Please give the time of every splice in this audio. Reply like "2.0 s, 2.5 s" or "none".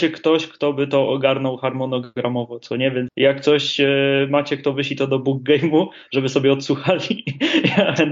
3.1 s